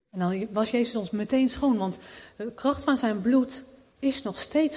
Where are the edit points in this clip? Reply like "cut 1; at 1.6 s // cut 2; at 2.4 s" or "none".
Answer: none